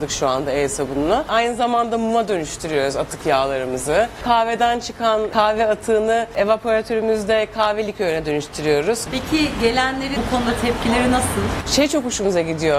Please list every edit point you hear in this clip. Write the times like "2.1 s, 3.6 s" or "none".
9.1 s, 10.2 s

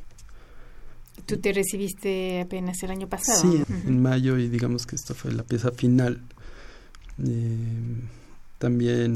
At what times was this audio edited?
3.6 s

